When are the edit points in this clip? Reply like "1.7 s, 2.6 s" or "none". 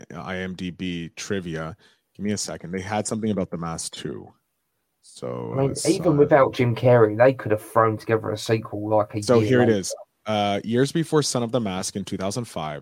none